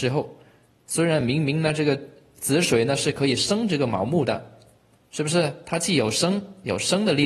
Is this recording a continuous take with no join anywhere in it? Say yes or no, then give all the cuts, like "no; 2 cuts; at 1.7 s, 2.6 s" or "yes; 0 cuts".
yes; 0 cuts